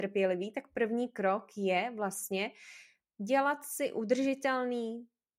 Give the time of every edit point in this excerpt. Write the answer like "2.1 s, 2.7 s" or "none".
none